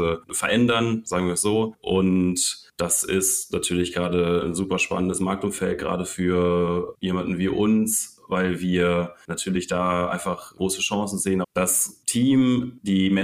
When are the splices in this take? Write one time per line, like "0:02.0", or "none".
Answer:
0:11.4